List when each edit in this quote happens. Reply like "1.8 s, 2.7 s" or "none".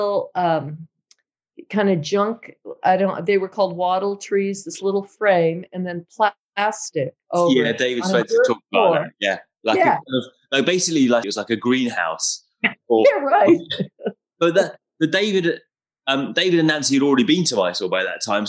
11.2 s